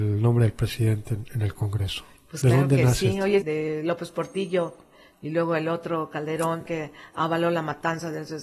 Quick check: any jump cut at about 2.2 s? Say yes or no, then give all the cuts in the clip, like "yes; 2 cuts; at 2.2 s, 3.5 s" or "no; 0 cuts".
no; 3 cuts; at 3.4 s, 5.1 s, 6.7 s